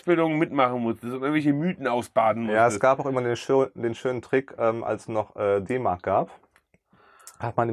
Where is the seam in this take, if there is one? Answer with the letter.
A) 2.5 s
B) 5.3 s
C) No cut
C